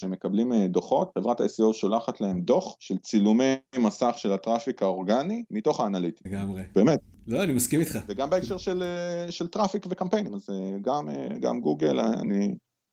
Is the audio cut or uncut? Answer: cut